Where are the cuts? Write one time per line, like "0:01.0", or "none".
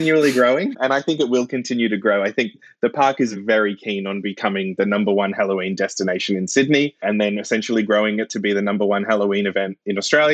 none